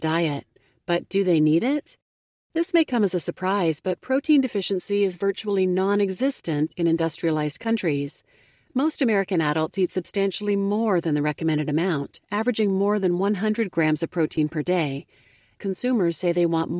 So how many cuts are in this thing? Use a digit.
1